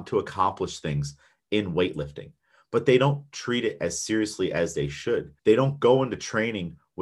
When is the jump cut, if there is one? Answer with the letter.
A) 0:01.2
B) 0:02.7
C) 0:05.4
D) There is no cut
C